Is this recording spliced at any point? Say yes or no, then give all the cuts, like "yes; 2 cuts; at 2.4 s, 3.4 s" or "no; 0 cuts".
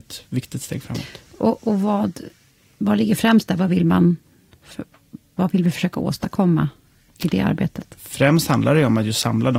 no; 0 cuts